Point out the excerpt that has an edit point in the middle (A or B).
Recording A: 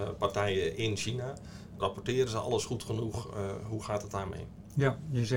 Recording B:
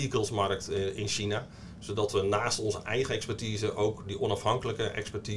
A